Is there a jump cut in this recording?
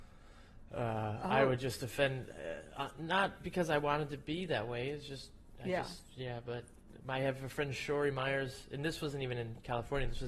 no; 0 cuts

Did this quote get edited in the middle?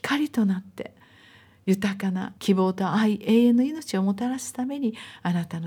yes; 1 cut; at 2.4 s

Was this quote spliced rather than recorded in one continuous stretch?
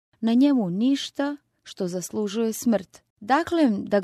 yes; 1 cut; at 3.1 s

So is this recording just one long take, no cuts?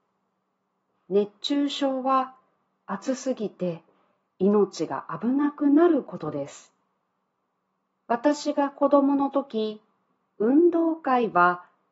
no; 1 cut; at 7.9 s

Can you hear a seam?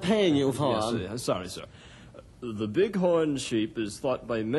no; 0 cuts

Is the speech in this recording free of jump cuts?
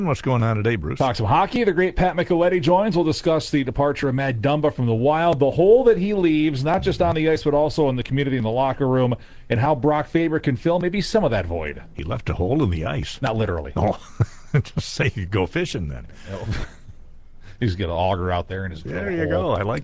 yes; 0 cuts

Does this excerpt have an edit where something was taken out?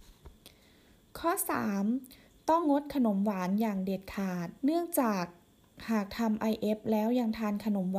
yes; 2 cuts; at 2.6 s, 4.6 s

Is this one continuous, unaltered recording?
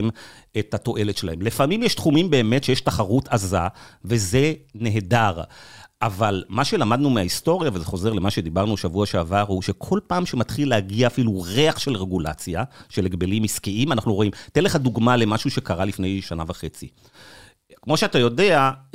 no; 1 cut; at 16.2 s

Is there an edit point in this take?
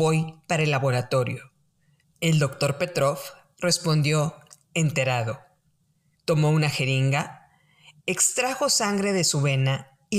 yes; 2 cuts; at 2.0 s, 6.1 s

